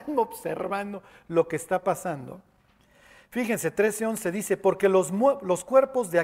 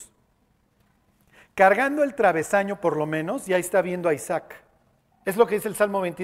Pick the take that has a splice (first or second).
second